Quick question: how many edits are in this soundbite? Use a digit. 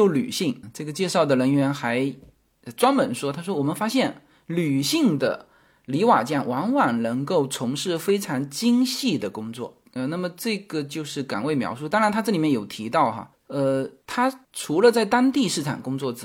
0